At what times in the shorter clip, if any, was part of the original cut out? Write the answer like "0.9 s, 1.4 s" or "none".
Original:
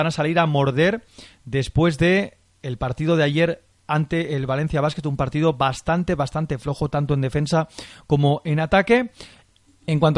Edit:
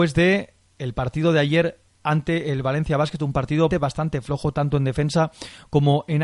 3.7 s